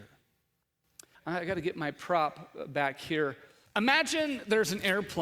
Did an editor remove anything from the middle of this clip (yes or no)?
yes